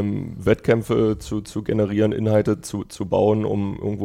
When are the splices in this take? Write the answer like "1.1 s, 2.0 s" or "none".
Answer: none